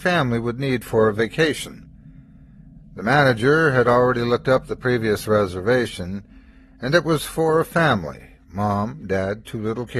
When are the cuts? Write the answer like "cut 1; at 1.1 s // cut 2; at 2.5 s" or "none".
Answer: none

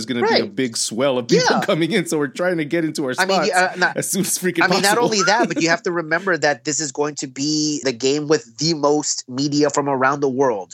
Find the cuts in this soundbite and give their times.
cut 1; at 7.8 s

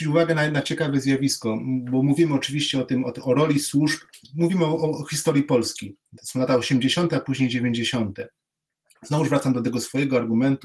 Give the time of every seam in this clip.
none

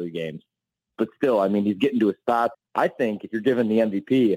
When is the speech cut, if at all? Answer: cut 1; at 0.9 s // cut 2; at 2.5 s

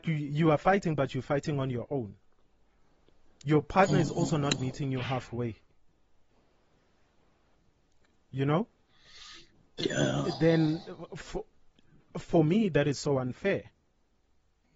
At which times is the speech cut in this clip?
none

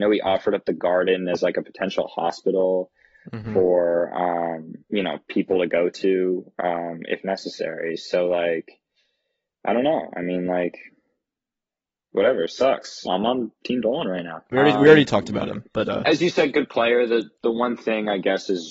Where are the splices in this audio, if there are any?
cut 1; at 4.8 s // cut 2; at 13.1 s // cut 3; at 14.5 s

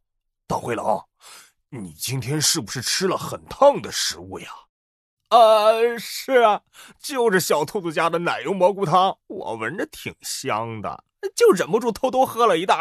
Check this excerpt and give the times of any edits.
cut 1; at 9.2 s

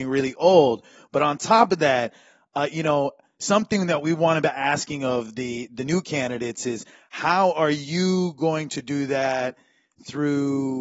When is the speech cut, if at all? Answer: none

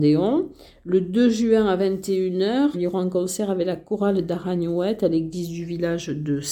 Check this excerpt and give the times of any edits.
cut 1; at 2.7 s

